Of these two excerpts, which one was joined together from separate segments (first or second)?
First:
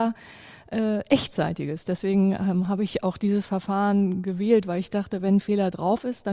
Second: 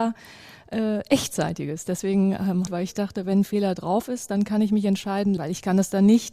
second